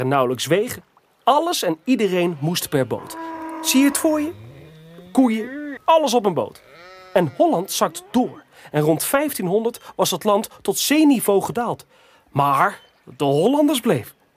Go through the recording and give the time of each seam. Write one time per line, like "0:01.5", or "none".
0:05.8